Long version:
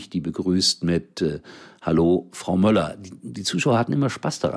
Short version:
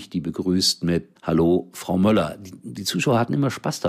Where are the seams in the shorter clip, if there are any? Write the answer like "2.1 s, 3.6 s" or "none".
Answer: 1.2 s